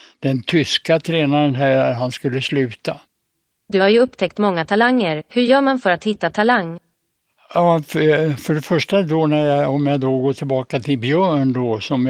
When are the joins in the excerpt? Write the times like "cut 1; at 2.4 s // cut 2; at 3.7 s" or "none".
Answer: none

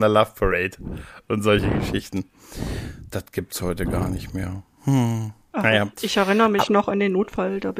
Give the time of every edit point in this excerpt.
none

